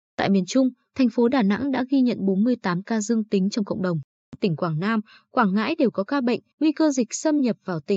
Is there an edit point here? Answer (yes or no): yes